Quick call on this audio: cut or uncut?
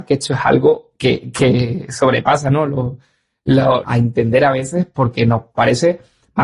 cut